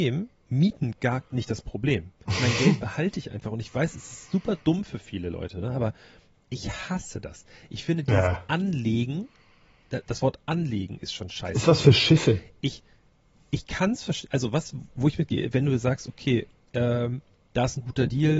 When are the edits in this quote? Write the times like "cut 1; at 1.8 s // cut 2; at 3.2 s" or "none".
cut 1; at 2.2 s